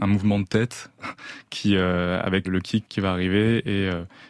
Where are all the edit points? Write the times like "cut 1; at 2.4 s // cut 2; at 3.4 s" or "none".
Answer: cut 1; at 2.4 s